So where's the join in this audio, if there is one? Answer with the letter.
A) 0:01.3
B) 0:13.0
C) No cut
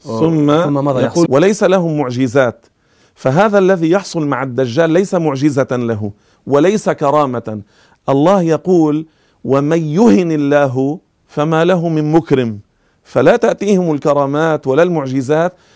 A